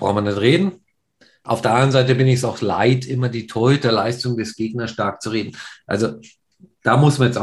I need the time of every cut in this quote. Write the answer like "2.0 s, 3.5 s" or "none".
none